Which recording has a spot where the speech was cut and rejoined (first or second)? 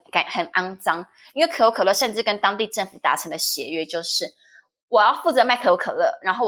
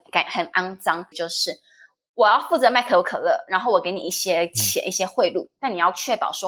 second